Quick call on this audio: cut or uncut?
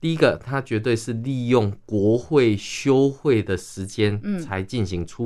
uncut